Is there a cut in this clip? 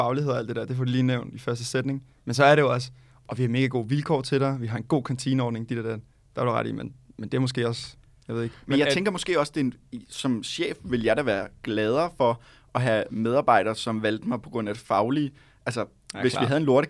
no; 0 cuts

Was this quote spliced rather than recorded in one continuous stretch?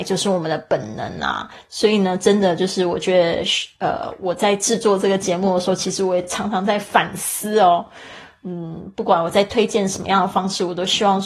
no; 0 cuts

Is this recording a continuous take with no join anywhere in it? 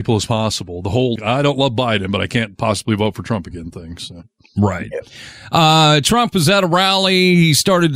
no; 1 cut; at 1.2 s

